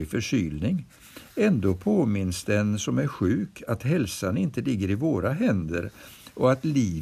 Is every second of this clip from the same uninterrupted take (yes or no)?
yes